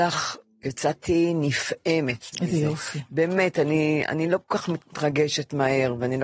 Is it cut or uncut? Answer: uncut